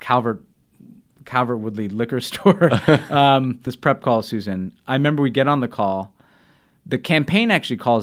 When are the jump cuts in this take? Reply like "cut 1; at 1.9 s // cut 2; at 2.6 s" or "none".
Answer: cut 1; at 3.7 s